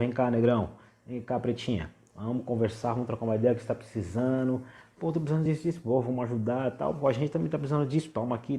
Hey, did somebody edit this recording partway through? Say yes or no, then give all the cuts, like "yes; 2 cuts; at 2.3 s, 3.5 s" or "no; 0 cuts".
no; 0 cuts